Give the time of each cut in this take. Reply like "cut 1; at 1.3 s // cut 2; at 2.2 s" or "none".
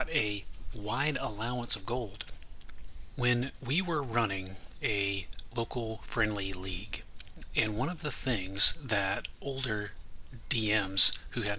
cut 1; at 3.1 s // cut 2; at 7.5 s